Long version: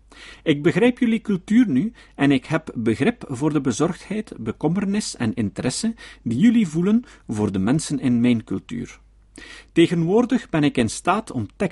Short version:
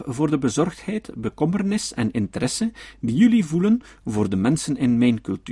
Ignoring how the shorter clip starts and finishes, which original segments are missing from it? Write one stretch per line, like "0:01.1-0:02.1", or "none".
none